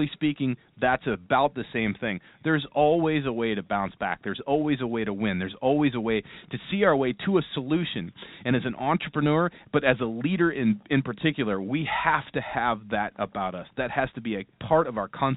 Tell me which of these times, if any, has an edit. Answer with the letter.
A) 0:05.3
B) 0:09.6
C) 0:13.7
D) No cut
D